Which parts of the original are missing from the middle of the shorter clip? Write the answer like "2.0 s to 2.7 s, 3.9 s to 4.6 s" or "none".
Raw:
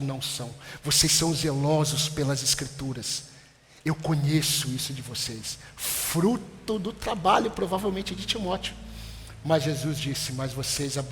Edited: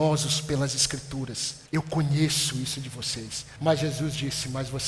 3.3 s to 3.8 s, 5.7 s to 9.4 s